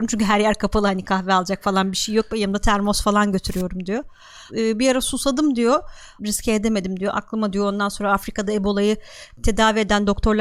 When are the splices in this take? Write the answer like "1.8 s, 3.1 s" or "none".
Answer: 4.5 s, 6.2 s